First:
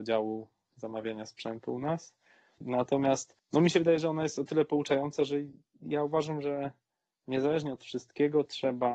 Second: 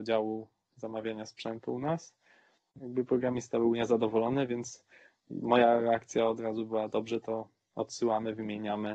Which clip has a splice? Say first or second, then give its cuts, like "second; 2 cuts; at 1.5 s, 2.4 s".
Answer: first; 1 cut; at 2.6 s